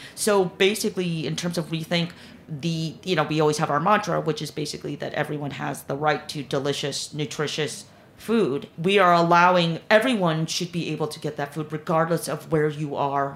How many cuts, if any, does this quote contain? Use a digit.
1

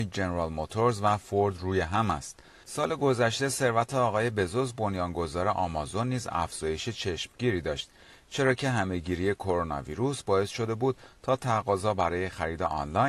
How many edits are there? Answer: 1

